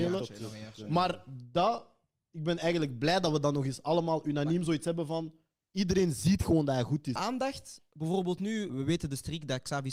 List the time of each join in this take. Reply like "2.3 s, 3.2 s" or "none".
7.2 s, 8.7 s